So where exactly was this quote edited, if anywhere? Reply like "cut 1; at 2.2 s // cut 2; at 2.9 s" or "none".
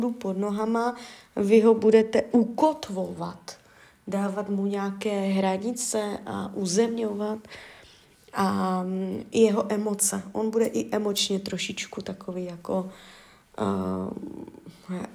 none